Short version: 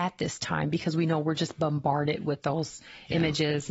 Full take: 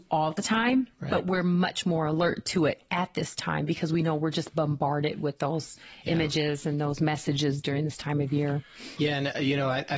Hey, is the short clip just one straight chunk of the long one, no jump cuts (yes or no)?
yes